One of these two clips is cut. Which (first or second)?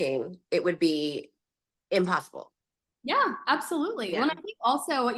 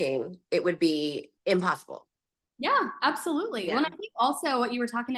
second